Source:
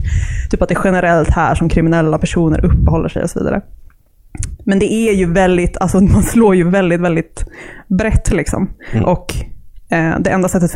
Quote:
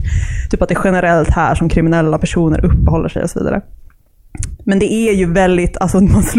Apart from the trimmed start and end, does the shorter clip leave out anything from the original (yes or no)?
no